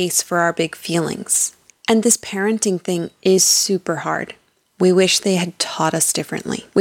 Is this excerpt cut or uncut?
cut